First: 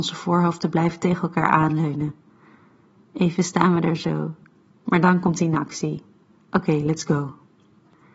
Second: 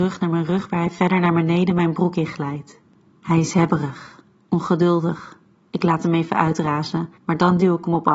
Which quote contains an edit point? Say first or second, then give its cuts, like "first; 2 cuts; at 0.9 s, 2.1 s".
second; 1 cut; at 7.2 s